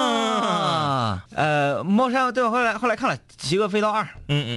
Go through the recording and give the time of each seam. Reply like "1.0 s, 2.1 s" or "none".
1.3 s